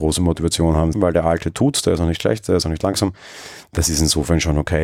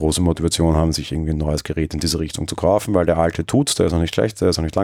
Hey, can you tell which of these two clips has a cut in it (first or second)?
first